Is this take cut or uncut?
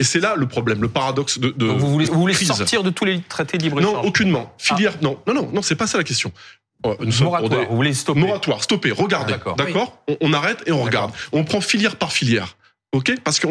cut